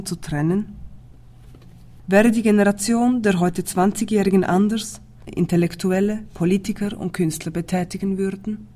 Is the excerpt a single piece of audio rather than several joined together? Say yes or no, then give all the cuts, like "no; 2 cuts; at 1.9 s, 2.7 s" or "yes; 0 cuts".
no; 1 cut; at 5.3 s